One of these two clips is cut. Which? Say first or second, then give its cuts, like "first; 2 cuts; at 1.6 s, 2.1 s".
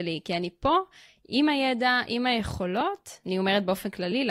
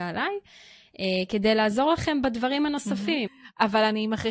second; 1 cut; at 3.3 s